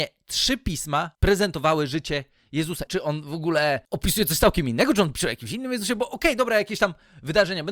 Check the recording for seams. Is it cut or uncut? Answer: cut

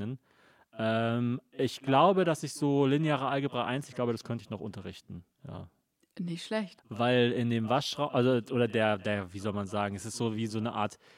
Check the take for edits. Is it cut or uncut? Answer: cut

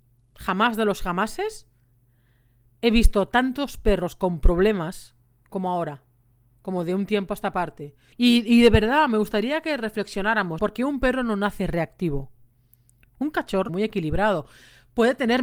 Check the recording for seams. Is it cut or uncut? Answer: cut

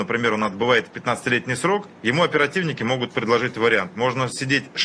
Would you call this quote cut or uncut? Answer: cut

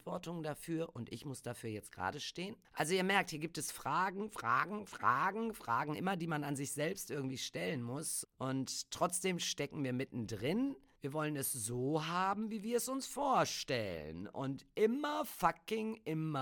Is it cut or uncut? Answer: cut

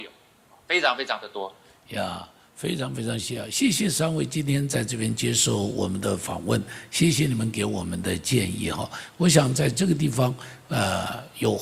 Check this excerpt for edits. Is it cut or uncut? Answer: cut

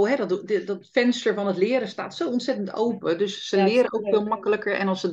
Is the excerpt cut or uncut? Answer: uncut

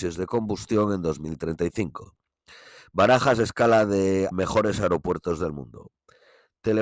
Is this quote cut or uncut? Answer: cut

